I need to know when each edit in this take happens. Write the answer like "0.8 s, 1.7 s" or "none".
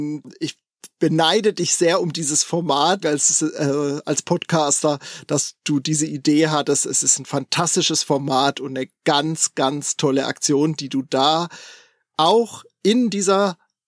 3.0 s

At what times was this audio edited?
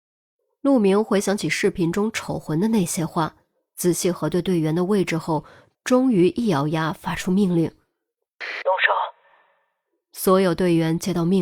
none

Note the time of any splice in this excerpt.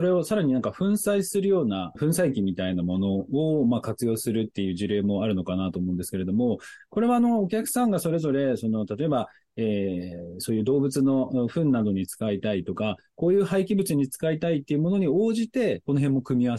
2.0 s

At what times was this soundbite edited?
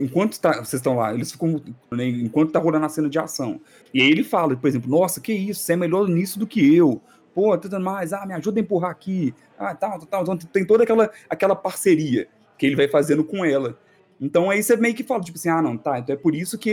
1.9 s

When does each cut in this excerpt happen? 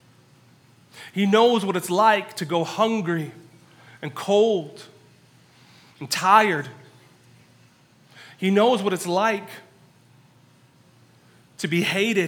none

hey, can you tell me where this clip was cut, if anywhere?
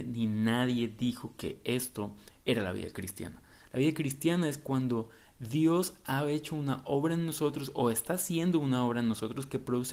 3.7 s

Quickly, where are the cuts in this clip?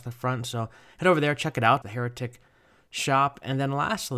1.8 s

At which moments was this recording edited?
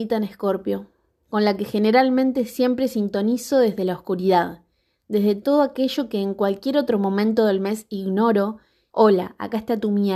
8.9 s

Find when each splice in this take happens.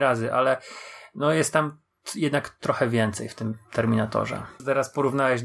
4.6 s

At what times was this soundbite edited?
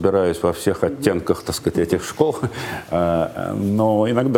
none

